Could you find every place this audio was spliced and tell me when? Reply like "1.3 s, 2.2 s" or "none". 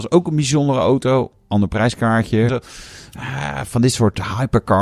2.5 s